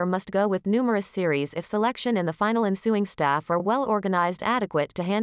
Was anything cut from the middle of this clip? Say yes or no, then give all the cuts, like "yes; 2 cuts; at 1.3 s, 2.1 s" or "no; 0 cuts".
no; 0 cuts